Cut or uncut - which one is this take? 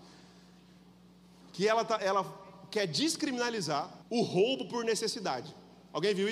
cut